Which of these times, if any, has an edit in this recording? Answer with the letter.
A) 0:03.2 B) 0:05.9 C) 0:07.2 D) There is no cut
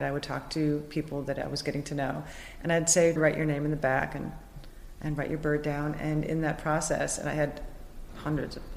A